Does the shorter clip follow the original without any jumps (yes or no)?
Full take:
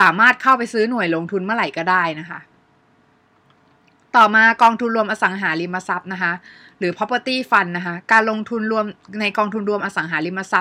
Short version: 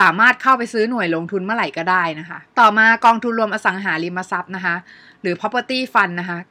no